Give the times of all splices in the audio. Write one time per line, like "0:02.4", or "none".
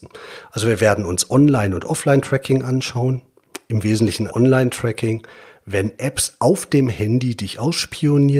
0:04.3